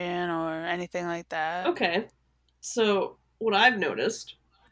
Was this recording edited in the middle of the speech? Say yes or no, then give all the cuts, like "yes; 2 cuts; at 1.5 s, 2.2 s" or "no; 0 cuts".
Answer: no; 0 cuts